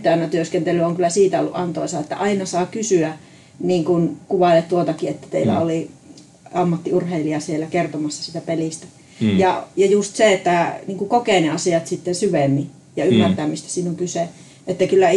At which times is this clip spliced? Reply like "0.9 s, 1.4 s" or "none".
none